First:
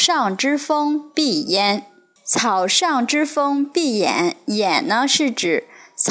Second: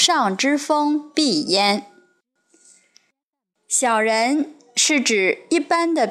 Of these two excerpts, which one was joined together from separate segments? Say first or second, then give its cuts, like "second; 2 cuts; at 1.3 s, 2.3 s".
first; 1 cut; at 2.2 s